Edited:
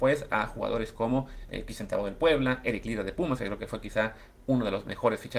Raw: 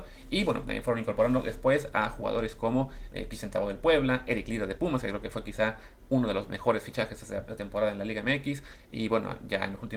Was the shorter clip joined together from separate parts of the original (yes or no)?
no